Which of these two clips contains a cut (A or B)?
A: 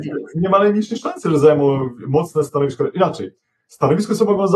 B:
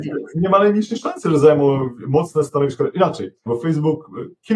B